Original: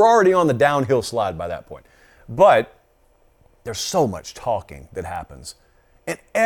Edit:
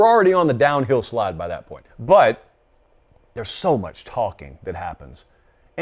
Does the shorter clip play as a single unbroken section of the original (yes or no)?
no